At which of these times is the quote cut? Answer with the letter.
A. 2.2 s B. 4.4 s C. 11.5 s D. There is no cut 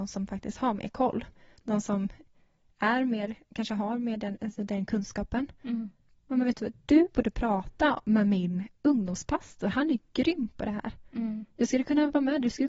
B